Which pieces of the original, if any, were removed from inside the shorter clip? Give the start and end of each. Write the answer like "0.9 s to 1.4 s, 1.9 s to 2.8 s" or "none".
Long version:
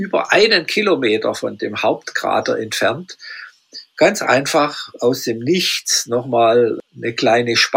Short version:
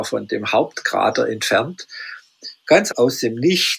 4.2 s to 4.9 s